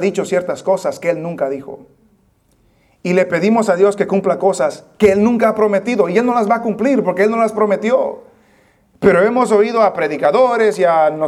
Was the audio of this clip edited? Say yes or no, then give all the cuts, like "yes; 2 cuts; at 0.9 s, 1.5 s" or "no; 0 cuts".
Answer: no; 0 cuts